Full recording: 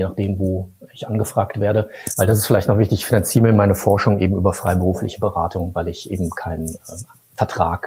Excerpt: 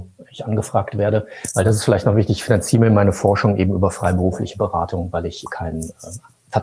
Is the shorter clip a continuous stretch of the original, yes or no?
no